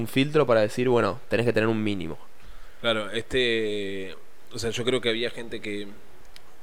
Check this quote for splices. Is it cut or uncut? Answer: uncut